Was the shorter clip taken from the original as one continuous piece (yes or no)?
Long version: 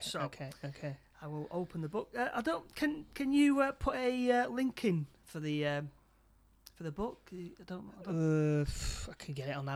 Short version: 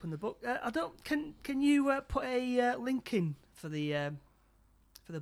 yes